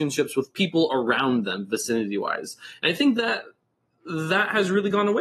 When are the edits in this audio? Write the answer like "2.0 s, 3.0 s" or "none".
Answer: none